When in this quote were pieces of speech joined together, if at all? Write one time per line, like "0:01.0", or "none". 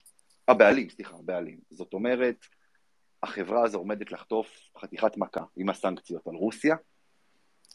none